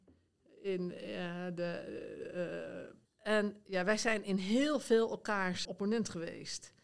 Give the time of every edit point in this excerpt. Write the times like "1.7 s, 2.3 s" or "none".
3.0 s, 5.6 s